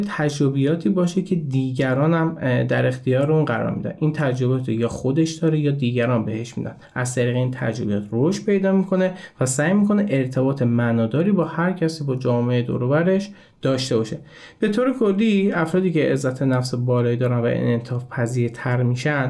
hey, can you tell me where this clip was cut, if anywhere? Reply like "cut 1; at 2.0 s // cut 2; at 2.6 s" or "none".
none